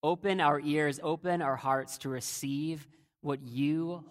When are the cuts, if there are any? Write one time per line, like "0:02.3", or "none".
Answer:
none